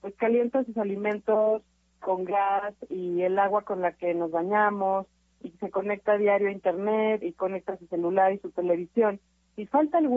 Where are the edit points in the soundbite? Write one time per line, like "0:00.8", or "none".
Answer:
0:07.2